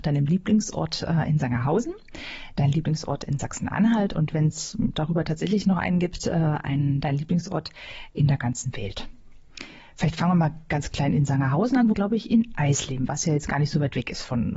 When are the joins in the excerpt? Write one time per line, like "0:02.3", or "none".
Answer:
0:11.9
0:13.1